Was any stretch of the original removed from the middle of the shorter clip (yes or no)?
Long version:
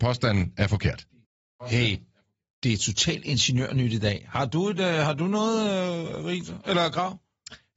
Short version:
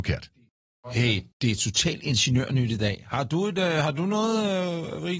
yes